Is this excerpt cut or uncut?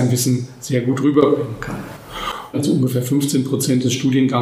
cut